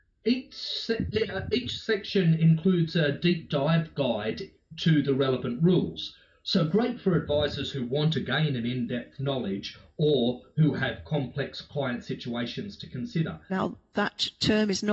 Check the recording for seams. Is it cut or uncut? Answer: cut